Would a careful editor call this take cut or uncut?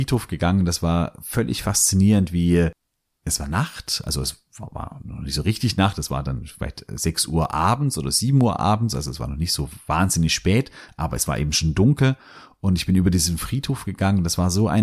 uncut